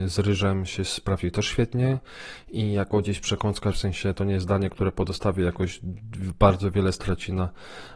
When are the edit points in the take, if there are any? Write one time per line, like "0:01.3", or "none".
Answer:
0:03.7